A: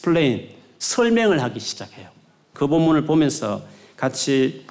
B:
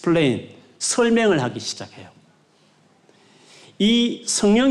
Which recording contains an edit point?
A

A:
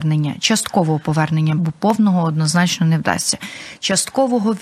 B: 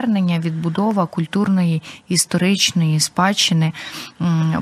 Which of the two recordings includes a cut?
A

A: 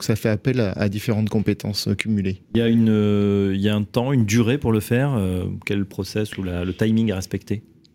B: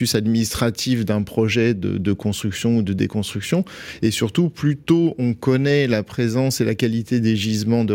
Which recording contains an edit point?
A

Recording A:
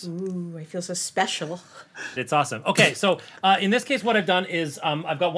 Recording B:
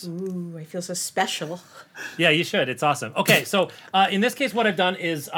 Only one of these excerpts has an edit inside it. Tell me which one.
A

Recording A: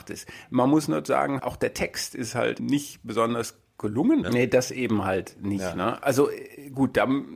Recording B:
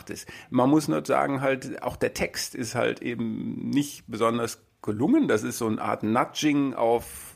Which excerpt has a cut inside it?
A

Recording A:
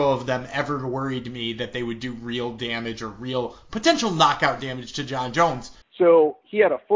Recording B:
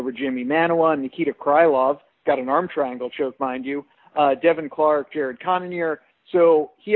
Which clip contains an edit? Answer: A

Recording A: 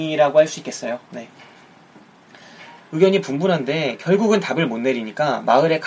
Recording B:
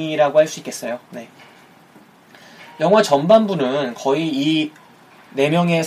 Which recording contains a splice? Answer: A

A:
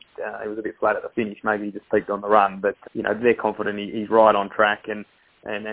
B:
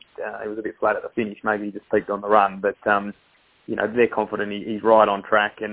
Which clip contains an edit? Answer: A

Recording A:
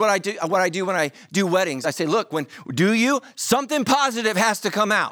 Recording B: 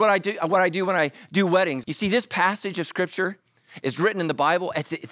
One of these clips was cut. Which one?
B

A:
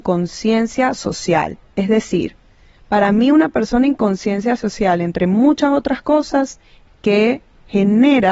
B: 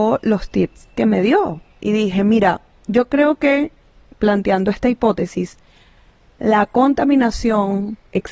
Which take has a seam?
A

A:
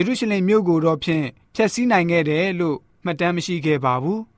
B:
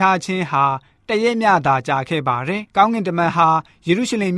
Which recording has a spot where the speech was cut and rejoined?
B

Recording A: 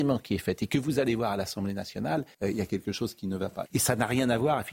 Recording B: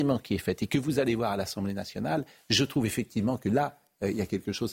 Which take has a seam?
A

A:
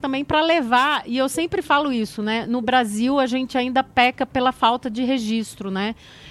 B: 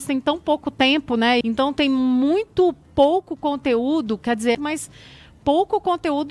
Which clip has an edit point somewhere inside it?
B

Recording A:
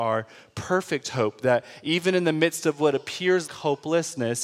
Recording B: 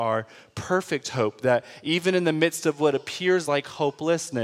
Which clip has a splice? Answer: A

